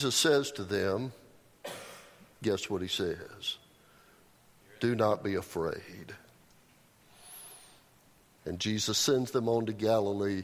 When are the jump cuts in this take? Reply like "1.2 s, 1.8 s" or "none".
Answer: none